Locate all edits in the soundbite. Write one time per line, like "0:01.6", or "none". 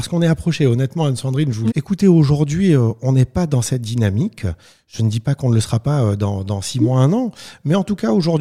0:01.7